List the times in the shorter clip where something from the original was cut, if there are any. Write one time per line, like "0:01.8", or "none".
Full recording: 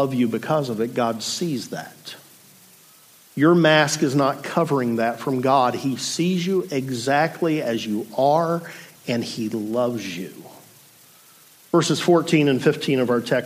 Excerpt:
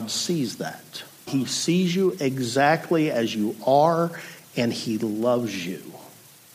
0:01.3